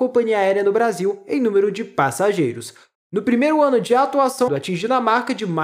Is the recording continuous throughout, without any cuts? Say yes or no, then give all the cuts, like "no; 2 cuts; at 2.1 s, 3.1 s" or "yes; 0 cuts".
no; 2 cuts; at 2.9 s, 4.5 s